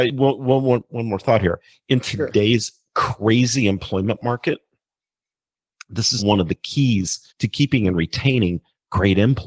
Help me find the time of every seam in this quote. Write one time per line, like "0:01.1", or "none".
0:06.2
0:07.3